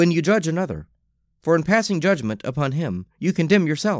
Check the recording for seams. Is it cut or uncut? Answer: uncut